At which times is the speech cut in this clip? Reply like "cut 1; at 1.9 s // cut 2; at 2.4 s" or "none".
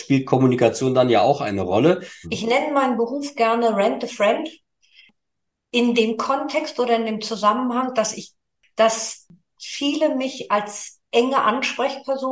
cut 1; at 2.2 s